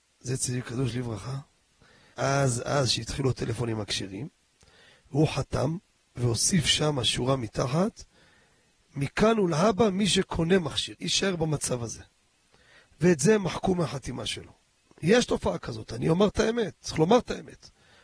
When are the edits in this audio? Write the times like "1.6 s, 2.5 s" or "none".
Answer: 2.1 s, 10.9 s